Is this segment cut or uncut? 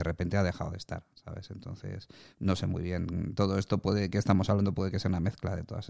uncut